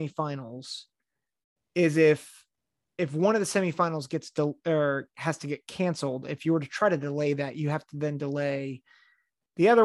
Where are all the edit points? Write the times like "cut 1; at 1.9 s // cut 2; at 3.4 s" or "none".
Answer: none